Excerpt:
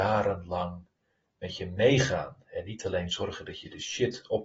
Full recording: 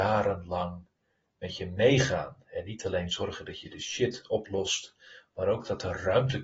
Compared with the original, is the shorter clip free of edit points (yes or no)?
yes